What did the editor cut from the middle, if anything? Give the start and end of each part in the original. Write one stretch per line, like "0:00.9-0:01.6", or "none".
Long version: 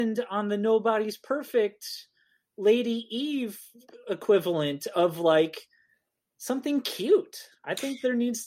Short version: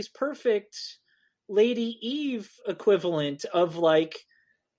0:03.7-0:04.0